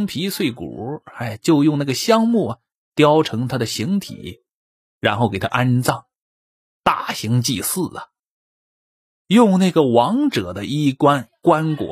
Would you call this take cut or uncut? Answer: uncut